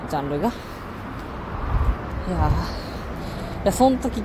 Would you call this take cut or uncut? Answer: uncut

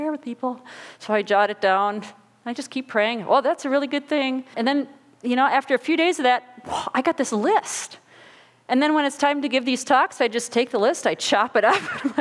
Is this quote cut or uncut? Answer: cut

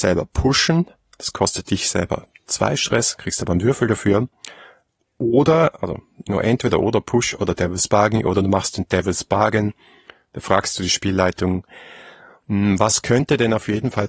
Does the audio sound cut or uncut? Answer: uncut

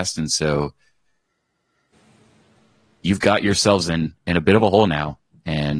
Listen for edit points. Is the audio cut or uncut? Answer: uncut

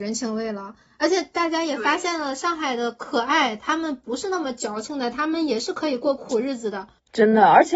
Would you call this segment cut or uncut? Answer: uncut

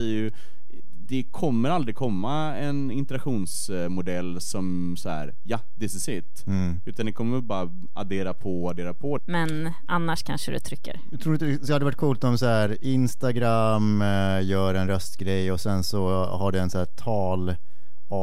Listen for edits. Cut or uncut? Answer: cut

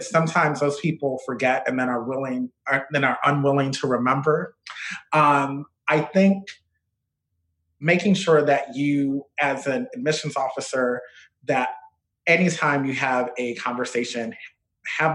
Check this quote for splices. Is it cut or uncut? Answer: uncut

